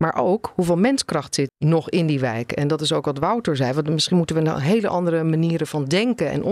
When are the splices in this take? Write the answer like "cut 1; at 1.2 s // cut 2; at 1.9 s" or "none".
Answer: cut 1; at 1.5 s

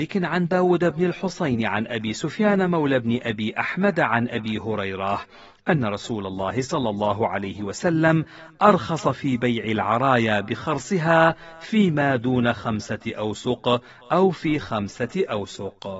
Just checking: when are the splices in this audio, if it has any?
none

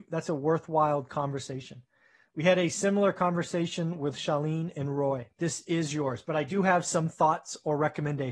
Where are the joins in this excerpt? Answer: cut 1; at 5.4 s

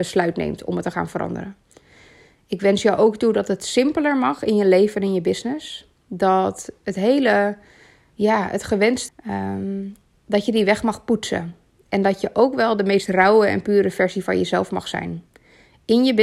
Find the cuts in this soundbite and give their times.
cut 1; at 9.1 s

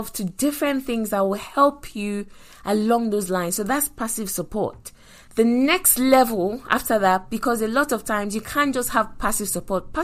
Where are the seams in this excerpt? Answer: none

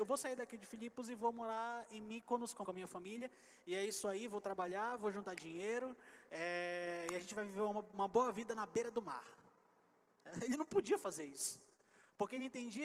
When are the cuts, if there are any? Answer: cut 1; at 2.6 s

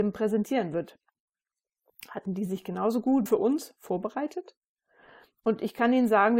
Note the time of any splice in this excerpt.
cut 1; at 3.3 s

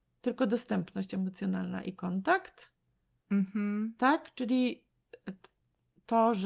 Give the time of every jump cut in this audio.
none

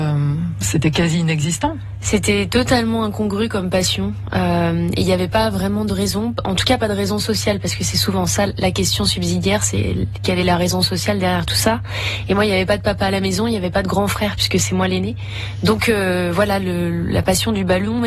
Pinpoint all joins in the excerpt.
none

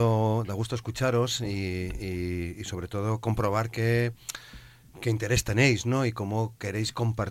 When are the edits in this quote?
none

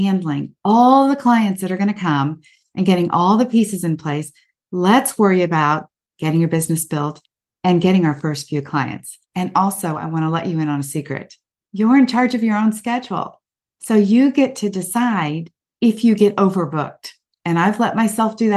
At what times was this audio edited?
cut 1; at 9.2 s

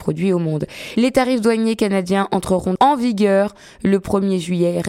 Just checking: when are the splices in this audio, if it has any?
cut 1; at 2.8 s

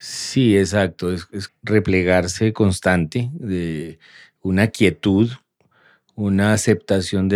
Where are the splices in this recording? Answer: cut 1; at 1.5 s

